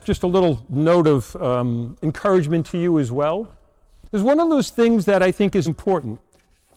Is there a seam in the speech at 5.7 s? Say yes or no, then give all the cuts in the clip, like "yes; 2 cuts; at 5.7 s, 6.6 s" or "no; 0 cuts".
yes; 1 cut; at 5.7 s